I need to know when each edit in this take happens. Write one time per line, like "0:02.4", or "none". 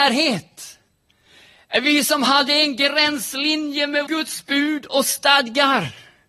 0:04.1